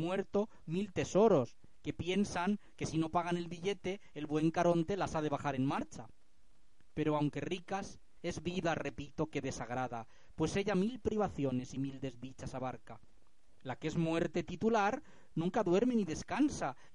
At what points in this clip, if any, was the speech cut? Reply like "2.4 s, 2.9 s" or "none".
none